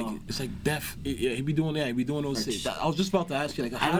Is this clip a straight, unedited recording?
no; 2 cuts; at 1.0 s, 2.4 s

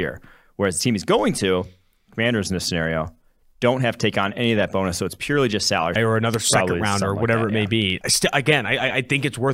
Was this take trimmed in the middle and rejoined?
yes; 2 cuts; at 6.0 s, 8.0 s

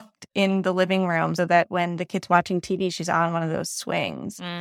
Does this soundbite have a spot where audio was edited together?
yes; 1 cut; at 1.4 s

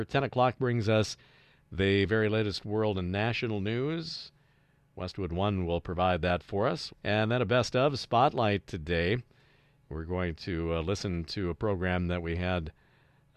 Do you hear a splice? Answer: yes; 1 cut; at 6.9 s

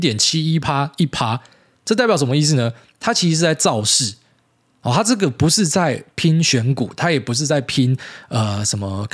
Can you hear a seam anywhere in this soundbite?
no; 0 cuts

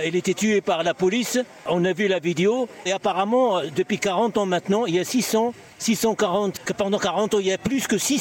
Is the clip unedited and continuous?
no; 2 cuts; at 2.9 s, 6.6 s

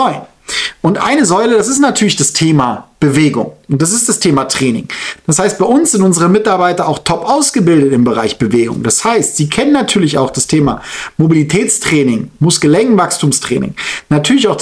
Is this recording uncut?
yes; 0 cuts

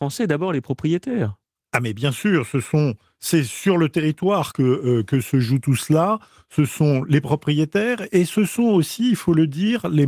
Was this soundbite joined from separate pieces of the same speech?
no; 0 cuts

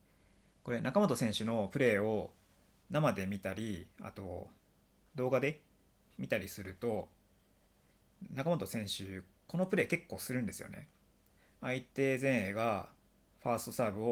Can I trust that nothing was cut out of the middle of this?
yes; 0 cuts

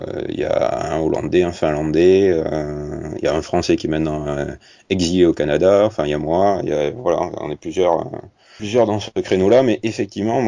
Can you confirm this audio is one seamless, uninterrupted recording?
yes; 0 cuts

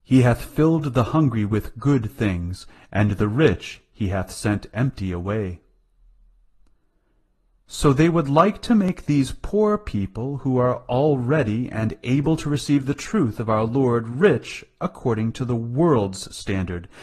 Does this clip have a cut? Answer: no; 0 cuts

